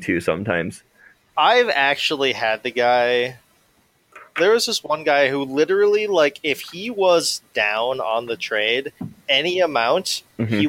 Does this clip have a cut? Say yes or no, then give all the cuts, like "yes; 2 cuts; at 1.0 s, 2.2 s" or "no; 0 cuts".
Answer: no; 0 cuts